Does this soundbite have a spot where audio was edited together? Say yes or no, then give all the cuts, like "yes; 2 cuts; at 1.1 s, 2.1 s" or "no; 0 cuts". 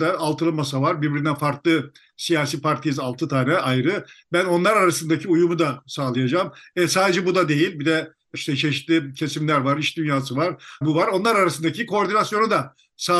yes; 2 cuts; at 8.3 s, 10.8 s